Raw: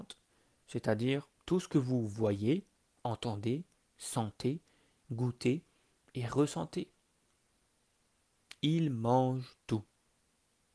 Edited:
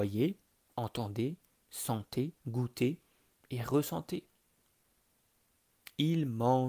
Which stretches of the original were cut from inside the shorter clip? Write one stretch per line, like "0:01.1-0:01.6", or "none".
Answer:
0:04.6-0:05.0